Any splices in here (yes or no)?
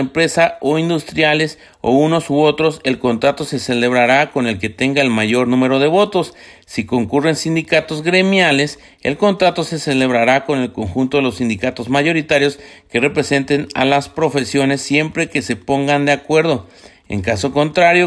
no